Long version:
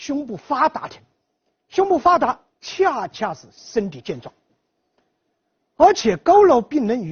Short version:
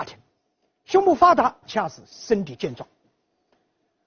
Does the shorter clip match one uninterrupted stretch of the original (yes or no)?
no